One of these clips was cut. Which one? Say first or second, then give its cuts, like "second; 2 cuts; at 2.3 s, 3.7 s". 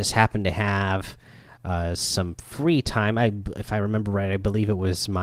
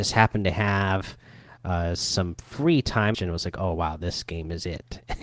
second; 1 cut; at 3.1 s